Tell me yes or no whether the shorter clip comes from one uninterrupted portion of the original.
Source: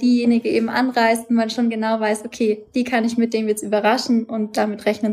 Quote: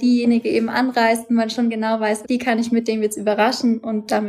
no